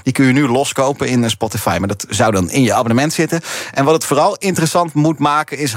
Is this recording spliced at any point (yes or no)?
no